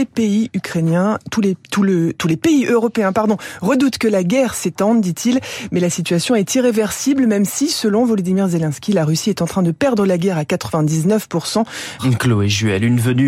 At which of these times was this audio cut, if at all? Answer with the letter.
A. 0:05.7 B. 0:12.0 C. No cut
B